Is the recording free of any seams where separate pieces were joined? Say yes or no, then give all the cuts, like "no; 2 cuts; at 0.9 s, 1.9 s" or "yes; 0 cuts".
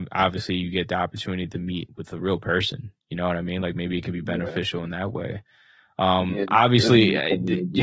yes; 0 cuts